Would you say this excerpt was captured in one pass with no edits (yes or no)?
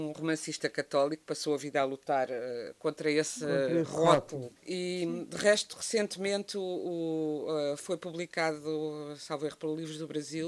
no